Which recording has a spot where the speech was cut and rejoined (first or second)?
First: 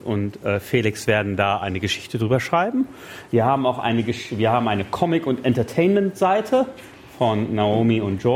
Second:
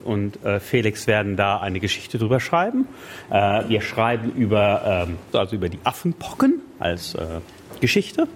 second